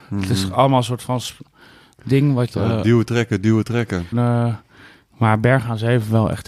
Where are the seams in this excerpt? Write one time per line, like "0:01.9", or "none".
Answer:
0:04.1